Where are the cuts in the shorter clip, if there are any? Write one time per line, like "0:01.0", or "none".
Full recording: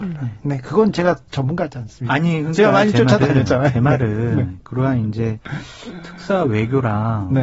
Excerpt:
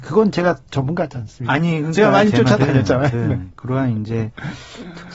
0:03.1